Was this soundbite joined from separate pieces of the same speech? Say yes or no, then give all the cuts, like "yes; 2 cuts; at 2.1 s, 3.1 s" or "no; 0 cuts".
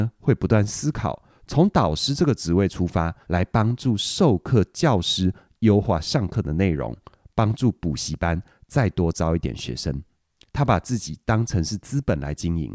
yes; 2 cuts; at 3.2 s, 10.5 s